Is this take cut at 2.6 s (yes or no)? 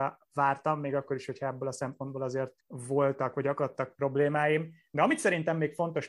yes